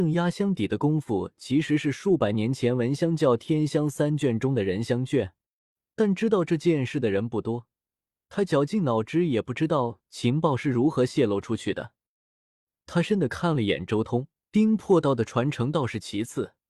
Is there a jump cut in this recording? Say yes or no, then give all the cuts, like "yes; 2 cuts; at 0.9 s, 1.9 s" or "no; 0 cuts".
yes; 2 cuts; at 13.0 s, 14.5 s